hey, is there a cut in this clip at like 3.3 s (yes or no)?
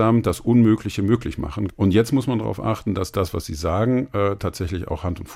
no